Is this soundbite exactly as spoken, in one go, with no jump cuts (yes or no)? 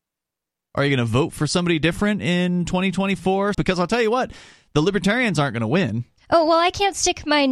no